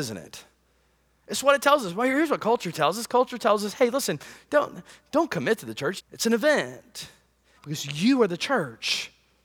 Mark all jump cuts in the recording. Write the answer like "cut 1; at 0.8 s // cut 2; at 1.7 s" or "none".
cut 1; at 6.0 s // cut 2; at 7.6 s